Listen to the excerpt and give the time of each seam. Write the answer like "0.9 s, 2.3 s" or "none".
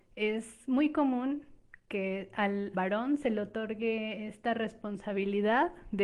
2.7 s